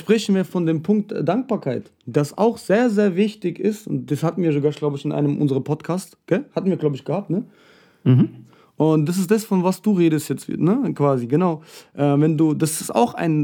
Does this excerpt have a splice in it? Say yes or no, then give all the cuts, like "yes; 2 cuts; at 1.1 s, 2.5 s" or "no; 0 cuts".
no; 0 cuts